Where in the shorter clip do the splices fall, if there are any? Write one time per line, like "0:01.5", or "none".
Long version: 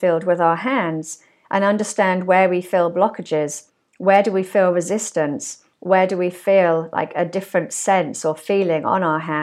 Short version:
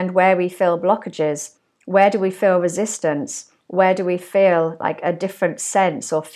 none